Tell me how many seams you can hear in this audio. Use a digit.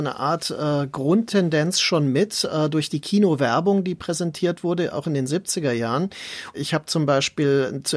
1